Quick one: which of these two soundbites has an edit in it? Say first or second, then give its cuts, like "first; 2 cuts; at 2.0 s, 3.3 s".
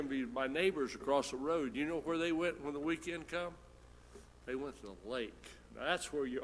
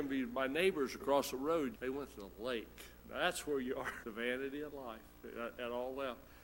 second; 2 cuts; at 1.7 s, 4.0 s